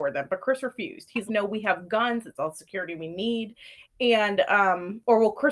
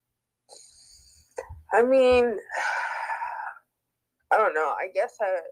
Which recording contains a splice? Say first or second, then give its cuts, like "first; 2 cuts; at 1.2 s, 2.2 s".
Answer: first; 2 cuts; at 1.3 s, 3.8 s